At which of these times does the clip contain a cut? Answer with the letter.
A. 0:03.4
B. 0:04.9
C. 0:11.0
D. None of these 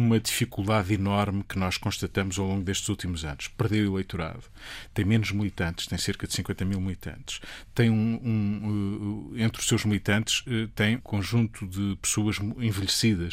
C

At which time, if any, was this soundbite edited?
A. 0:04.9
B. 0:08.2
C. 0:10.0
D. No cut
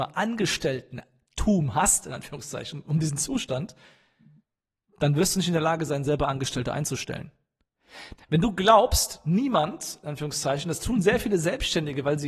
B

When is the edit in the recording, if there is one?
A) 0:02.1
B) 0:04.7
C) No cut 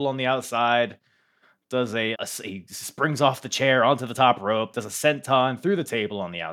A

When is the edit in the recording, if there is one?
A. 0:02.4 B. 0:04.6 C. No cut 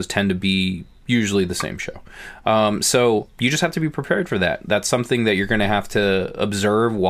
C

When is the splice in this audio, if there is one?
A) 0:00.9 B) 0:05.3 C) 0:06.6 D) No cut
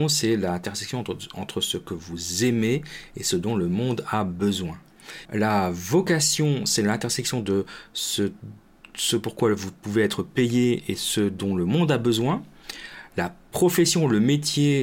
B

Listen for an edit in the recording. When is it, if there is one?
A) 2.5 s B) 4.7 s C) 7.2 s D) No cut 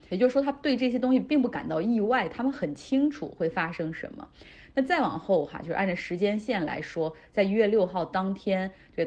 D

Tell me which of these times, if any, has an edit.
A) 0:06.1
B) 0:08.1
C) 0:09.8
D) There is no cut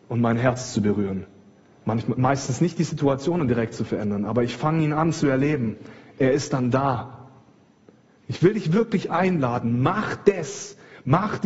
B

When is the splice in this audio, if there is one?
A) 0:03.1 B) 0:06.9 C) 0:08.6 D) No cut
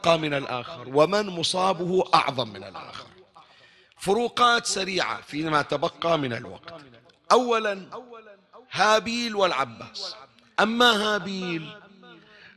C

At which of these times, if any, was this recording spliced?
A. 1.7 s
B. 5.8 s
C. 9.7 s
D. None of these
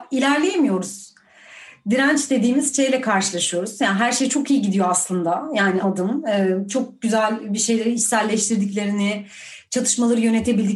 B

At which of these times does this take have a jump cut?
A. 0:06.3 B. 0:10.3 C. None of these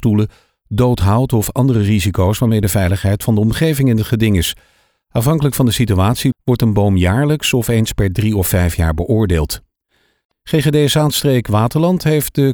A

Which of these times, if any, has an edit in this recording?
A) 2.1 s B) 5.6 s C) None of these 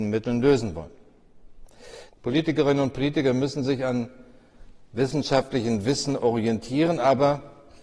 A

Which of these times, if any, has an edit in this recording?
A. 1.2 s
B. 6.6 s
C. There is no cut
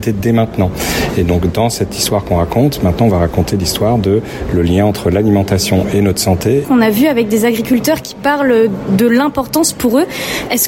B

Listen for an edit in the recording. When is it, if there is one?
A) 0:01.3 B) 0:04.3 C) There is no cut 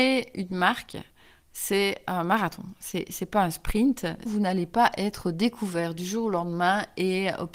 B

